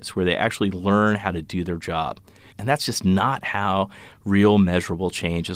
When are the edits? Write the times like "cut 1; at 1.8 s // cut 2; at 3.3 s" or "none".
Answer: cut 1; at 2.5 s